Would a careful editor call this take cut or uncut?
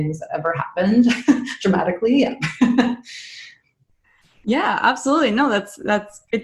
uncut